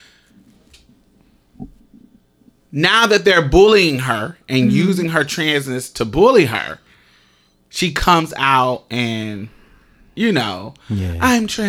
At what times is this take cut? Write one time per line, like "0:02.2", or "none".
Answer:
none